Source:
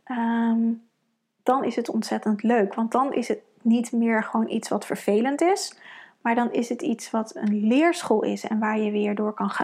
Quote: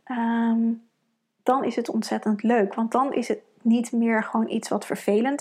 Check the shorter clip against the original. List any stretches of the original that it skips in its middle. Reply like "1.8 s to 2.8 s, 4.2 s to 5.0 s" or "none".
none